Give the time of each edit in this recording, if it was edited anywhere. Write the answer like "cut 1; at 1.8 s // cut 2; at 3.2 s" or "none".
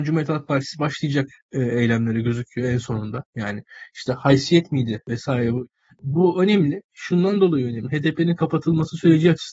none

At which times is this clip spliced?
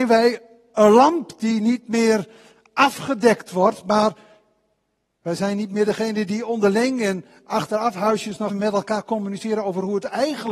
cut 1; at 8.5 s

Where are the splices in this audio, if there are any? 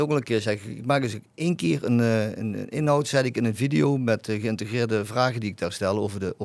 none

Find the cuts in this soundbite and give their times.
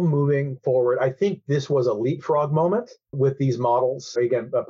cut 1; at 3.1 s

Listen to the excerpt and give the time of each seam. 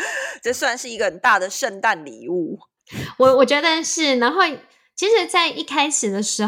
none

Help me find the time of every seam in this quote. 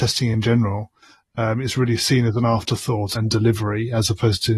cut 1; at 3.2 s

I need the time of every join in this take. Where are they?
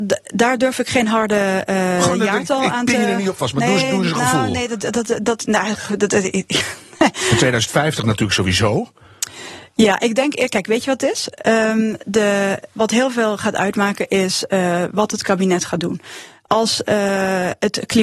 none

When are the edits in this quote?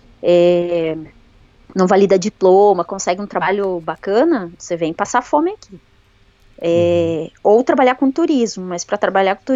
none

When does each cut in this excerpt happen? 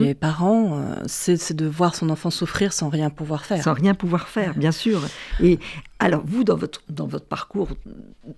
none

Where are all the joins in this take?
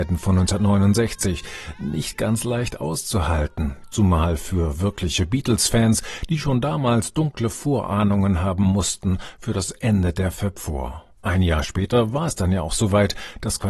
none

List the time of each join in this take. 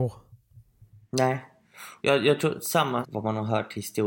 cut 1; at 2.0 s // cut 2; at 3.0 s

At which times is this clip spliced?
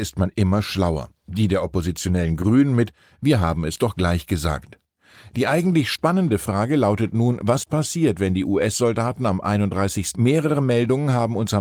cut 1; at 10.1 s

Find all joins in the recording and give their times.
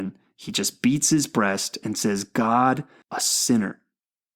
cut 1; at 3.0 s

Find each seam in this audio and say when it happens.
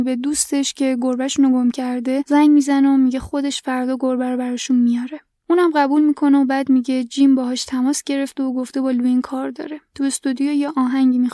none

